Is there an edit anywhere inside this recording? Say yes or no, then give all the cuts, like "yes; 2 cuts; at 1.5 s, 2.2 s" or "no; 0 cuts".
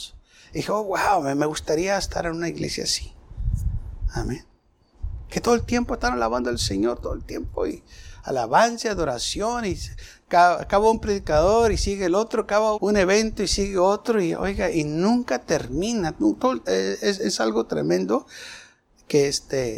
yes; 2 cuts; at 12.8 s, 16.6 s